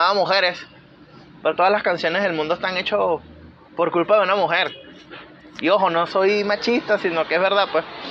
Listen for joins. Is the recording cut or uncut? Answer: cut